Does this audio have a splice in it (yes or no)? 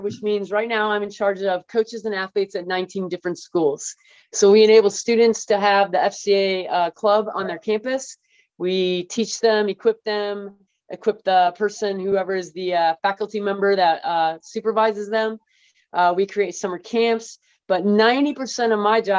no